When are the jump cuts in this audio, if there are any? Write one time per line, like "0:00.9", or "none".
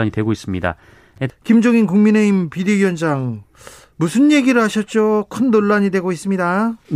0:01.3